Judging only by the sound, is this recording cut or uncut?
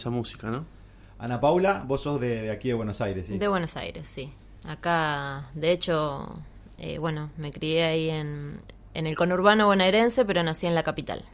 uncut